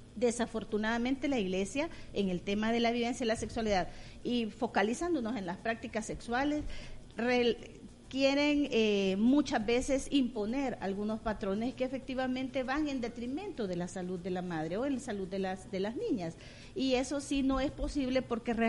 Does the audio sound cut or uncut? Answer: uncut